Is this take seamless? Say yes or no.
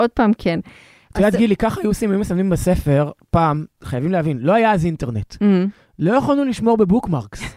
yes